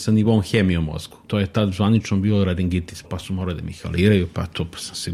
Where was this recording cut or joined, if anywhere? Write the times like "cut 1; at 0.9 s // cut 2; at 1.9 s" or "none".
cut 1; at 1.3 s // cut 2; at 3.0 s